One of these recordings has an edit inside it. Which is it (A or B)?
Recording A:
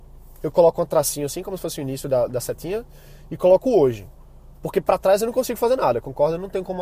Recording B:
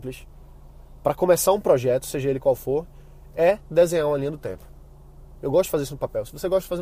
B